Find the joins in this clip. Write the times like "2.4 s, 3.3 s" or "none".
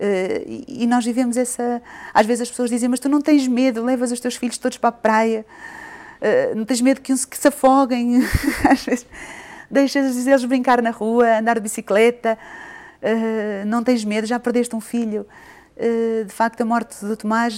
none